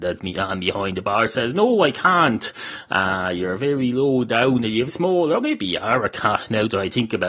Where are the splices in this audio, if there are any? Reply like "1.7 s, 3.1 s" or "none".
4.9 s